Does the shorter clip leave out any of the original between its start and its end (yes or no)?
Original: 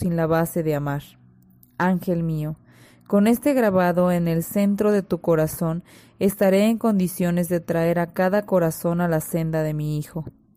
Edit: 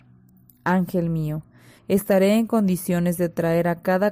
yes